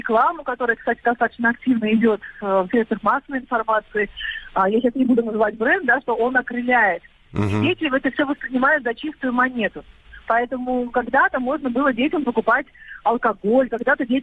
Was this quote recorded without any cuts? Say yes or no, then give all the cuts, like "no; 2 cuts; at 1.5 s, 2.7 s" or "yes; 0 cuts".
yes; 0 cuts